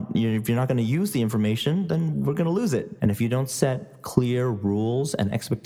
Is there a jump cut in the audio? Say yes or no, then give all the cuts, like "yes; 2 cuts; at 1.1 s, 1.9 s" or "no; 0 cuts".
yes; 1 cut; at 3.0 s